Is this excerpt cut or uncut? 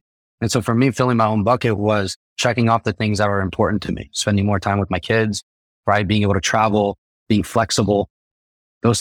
uncut